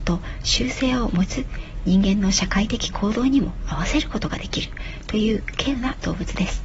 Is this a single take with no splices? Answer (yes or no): no